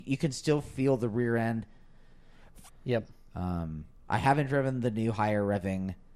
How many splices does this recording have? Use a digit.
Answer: 2